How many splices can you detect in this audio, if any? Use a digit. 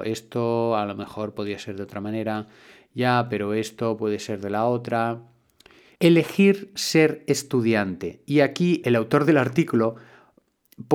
2